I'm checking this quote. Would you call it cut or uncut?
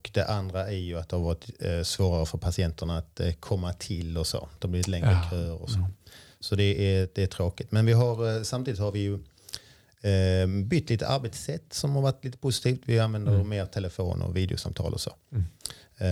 uncut